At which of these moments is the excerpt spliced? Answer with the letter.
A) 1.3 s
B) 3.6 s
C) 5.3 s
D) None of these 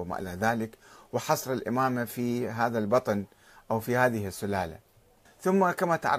C